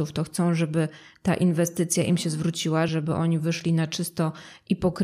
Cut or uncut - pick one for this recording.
cut